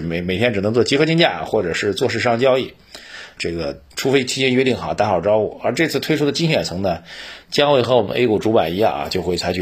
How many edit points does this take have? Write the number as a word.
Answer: one